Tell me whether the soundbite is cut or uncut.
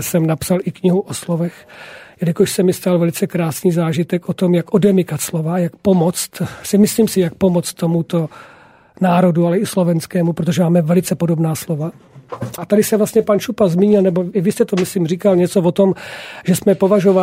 cut